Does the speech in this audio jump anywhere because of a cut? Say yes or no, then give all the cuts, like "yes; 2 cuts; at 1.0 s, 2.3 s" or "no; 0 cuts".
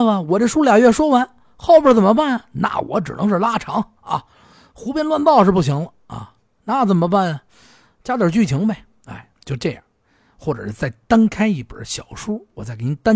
no; 0 cuts